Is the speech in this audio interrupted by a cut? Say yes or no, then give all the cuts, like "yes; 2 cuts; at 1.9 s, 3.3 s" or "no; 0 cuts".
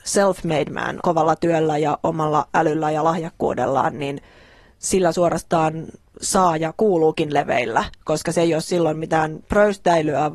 yes; 1 cut; at 1.0 s